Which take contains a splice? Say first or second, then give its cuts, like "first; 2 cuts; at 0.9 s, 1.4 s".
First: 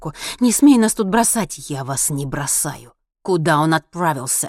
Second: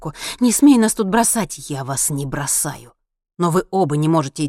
first; 1 cut; at 3.0 s